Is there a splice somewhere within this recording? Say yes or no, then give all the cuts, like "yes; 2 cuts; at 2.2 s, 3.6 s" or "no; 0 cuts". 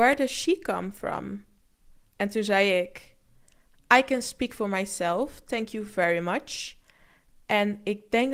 no; 0 cuts